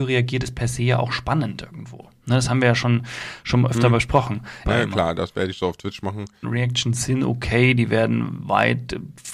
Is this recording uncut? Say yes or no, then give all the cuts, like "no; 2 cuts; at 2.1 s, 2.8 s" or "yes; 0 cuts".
no; 2 cuts; at 4.6 s, 6.4 s